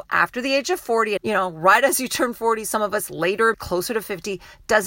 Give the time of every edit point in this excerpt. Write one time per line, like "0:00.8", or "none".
0:01.2
0:03.5